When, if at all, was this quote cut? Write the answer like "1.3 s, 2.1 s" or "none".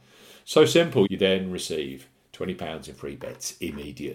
1.0 s